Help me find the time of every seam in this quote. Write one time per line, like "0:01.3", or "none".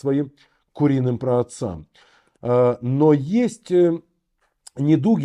none